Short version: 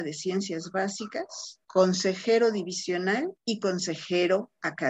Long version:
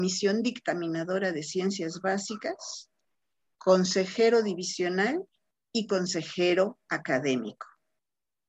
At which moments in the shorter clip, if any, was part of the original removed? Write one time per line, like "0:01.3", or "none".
0:01.6
0:03.4